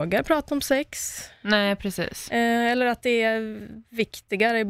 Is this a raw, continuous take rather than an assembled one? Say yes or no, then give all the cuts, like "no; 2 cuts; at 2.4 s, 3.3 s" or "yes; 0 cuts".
yes; 0 cuts